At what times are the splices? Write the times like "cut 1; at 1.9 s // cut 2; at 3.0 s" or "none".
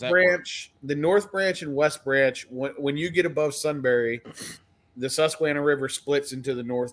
none